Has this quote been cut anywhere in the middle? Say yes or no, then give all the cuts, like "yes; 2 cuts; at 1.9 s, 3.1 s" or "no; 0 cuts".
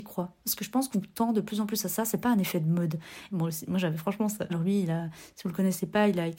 yes; 2 cuts; at 3.3 s, 4.5 s